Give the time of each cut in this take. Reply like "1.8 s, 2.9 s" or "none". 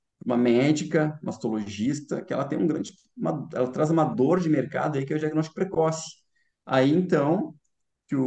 6.5 s